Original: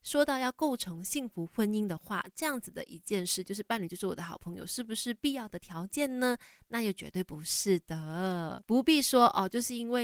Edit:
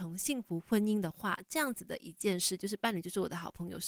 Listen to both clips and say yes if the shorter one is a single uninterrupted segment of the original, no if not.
yes